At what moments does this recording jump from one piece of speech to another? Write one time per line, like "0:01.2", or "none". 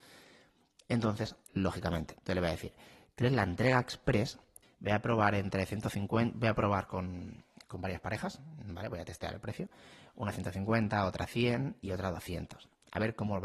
0:01.5
0:04.6